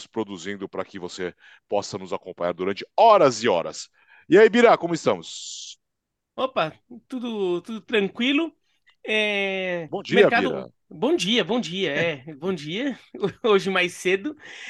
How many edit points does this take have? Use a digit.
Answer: 0